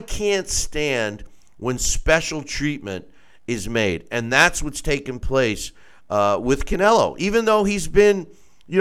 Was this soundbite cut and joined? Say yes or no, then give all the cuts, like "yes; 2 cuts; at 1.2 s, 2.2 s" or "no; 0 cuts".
no; 0 cuts